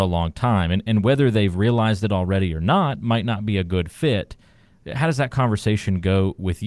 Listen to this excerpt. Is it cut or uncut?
uncut